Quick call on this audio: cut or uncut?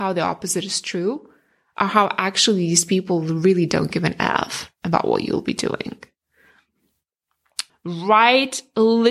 cut